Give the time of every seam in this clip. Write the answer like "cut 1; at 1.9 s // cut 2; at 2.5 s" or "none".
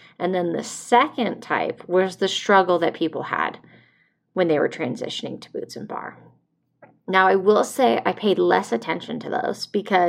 none